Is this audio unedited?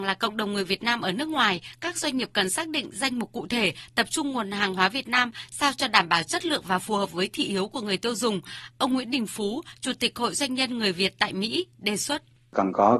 yes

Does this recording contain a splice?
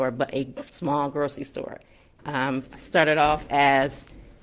yes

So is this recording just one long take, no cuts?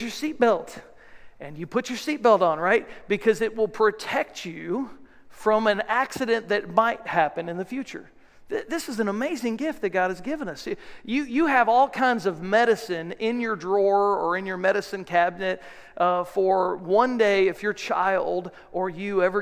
yes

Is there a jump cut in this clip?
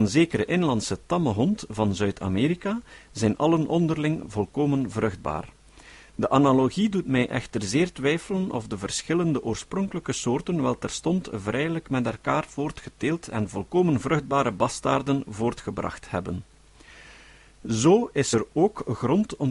no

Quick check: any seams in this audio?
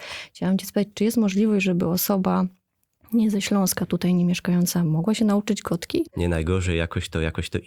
yes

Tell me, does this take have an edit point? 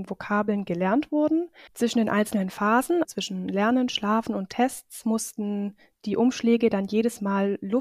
yes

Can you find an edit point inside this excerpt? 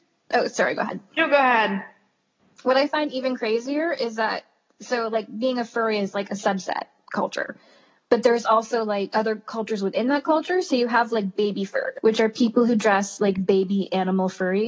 no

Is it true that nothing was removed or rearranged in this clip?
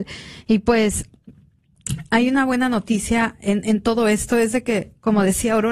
yes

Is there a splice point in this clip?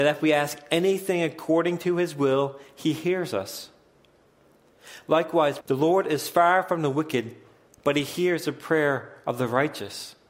yes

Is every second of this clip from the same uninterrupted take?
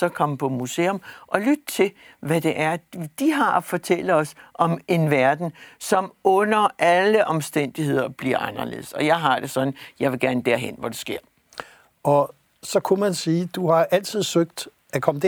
yes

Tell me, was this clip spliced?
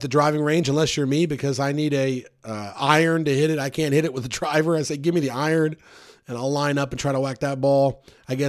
no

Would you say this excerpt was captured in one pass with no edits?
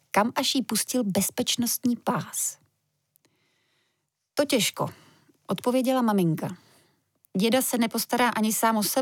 yes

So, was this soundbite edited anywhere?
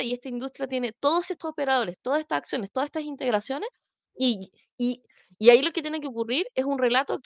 no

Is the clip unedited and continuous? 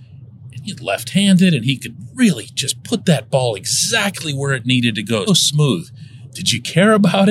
no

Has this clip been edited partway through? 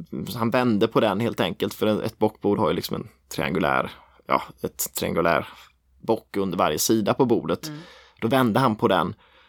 no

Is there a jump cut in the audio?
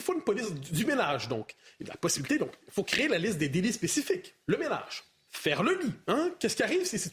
no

